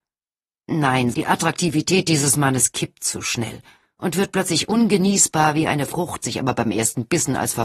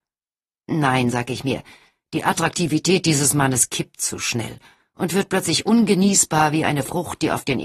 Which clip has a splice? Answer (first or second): first